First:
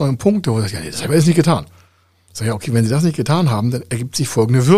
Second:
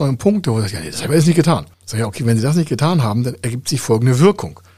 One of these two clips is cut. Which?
second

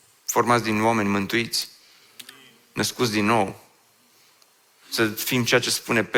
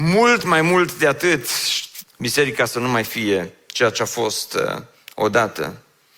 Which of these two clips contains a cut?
second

